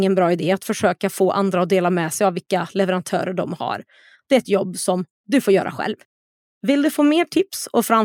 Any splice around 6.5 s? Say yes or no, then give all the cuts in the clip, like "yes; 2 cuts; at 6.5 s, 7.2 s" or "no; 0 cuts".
no; 0 cuts